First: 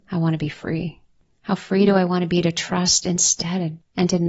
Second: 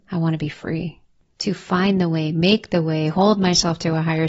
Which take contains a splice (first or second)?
second